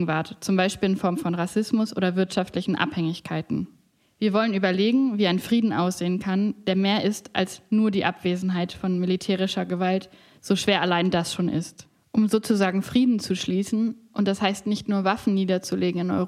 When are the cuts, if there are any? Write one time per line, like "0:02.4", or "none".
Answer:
none